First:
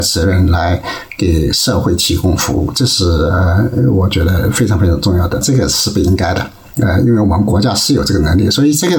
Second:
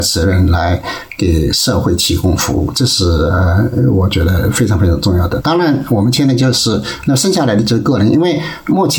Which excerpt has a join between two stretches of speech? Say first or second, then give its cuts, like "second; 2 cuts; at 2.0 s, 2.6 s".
first; 1 cut; at 5.4 s